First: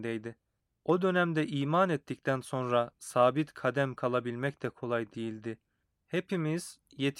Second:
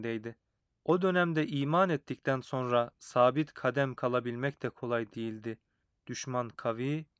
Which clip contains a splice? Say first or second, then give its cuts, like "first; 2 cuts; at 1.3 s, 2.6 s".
first; 1 cut; at 5.9 s